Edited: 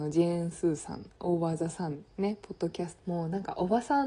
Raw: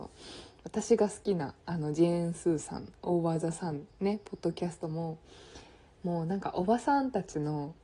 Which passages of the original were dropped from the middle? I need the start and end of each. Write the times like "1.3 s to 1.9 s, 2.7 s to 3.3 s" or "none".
4.8 s to 5.9 s